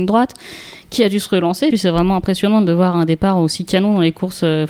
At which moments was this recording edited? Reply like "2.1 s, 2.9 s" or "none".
1.7 s